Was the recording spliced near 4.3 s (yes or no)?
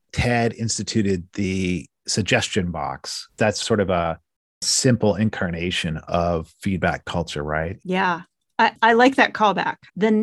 no